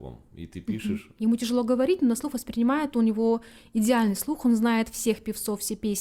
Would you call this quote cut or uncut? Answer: cut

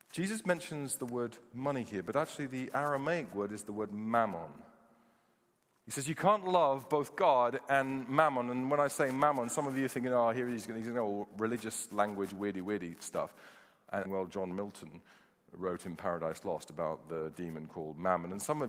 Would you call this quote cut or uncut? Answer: cut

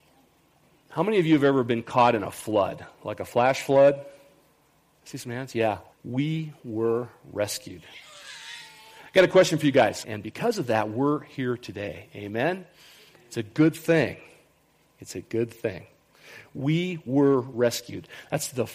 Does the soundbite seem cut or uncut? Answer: cut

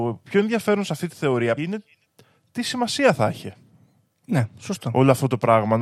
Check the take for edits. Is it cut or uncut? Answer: cut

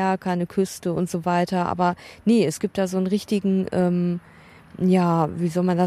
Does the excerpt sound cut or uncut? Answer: uncut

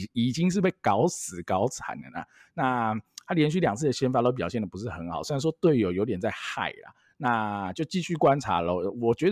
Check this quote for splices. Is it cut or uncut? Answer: uncut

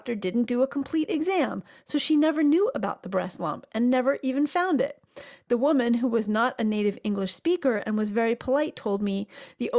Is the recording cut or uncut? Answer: uncut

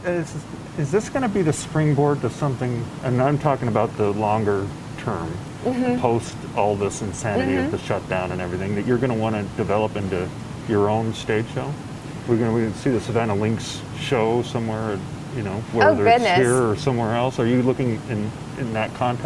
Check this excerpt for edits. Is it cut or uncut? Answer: uncut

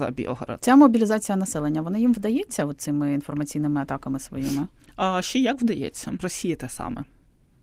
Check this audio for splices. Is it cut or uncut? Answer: cut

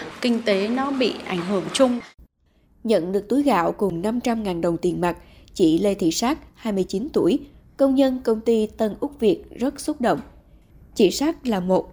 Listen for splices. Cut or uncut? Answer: uncut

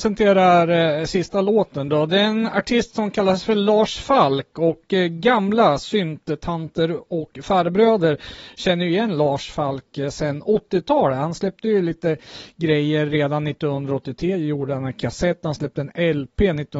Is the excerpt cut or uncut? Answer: uncut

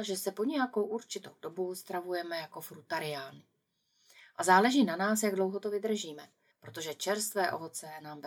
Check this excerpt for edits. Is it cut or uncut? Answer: cut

